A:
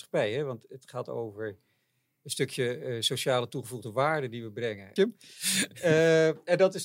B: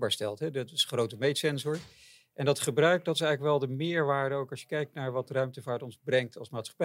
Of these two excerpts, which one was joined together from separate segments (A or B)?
A